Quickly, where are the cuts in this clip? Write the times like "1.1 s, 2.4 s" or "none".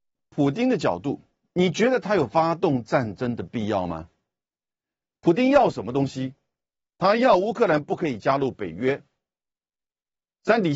none